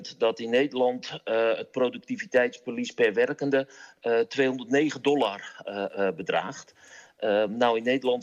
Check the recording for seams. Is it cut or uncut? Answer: uncut